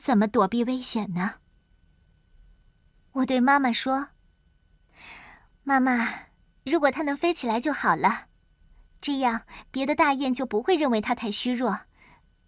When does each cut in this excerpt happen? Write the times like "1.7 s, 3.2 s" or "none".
3.1 s